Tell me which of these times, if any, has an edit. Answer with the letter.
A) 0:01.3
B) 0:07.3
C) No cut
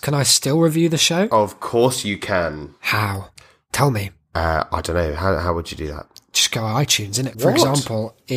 B